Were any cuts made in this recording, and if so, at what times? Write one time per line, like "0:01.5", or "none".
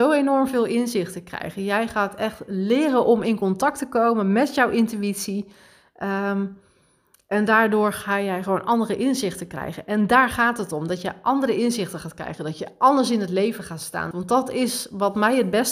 0:14.1